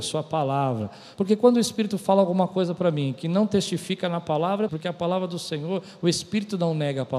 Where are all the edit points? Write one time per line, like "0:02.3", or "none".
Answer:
0:01.1
0:04.7